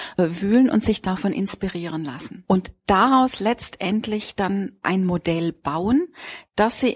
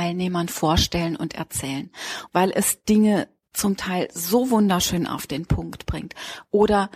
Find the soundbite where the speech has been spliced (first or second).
second